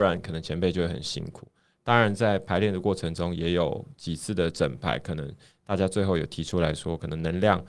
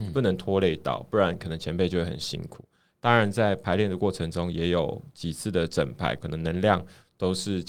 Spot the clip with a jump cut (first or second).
second